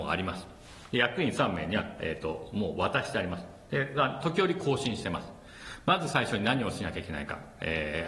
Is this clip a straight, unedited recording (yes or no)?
yes